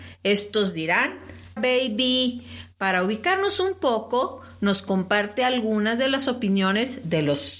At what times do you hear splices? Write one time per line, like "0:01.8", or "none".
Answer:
0:01.6

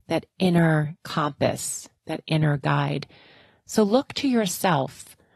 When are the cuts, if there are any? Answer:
none

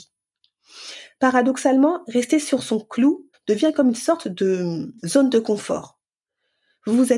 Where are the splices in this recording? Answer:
0:03.3
0:05.0

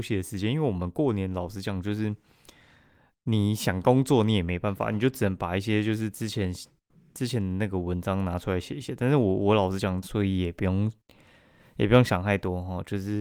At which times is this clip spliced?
0:10.0

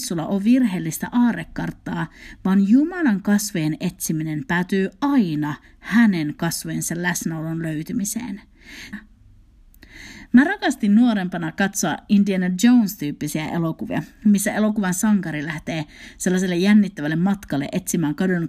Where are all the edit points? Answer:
0:08.9

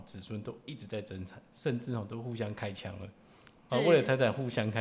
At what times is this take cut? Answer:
0:03.7

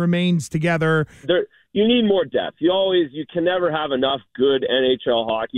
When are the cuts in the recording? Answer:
0:01.2

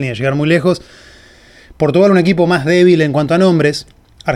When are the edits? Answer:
none

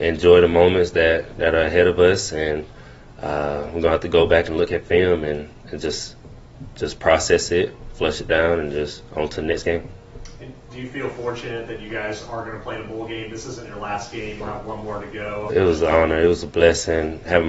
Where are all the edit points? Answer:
0:14.4
0:15.5

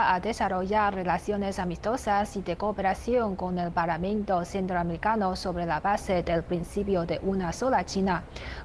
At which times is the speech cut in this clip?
none

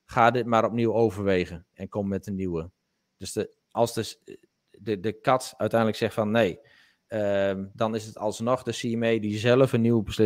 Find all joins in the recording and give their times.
0:07.7

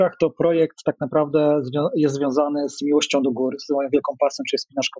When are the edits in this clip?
none

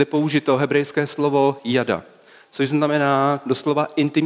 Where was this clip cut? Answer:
none

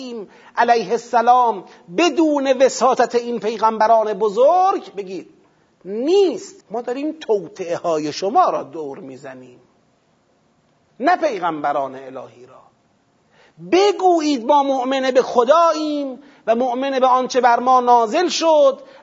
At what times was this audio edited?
0:06.6

